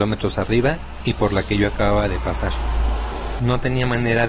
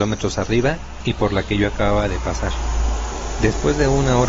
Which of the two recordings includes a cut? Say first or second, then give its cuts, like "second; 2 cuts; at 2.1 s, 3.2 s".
first; 1 cut; at 3.4 s